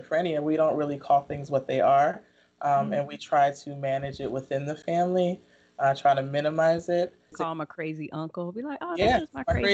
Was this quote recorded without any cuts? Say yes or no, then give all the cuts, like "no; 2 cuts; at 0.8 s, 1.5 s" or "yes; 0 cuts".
no; 1 cut; at 7.3 s